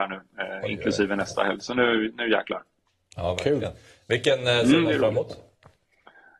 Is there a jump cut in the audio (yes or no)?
no